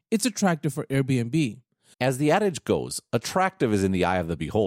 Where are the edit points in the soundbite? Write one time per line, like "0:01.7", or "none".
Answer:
0:01.9